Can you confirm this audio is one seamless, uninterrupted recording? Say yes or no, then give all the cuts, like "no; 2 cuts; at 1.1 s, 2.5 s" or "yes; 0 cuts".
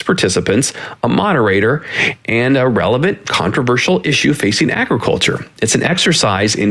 yes; 0 cuts